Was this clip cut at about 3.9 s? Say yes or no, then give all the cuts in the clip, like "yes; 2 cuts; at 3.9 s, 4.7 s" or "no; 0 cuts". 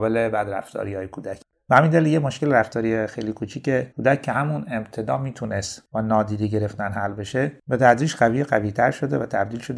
yes; 1 cut; at 3.9 s